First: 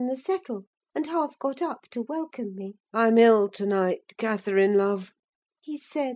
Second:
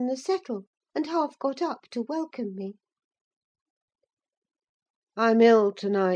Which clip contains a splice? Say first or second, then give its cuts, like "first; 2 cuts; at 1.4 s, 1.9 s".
first; 1 cut; at 2.8 s